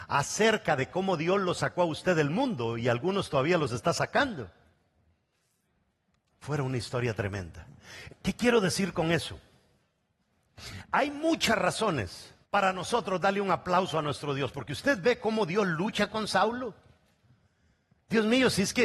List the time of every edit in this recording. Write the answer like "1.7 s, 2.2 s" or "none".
8.1 s, 12.4 s